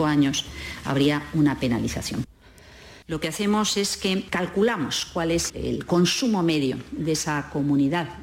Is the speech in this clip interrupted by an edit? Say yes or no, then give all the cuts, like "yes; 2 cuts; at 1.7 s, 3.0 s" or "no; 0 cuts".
yes; 2 cuts; at 3.0 s, 5.5 s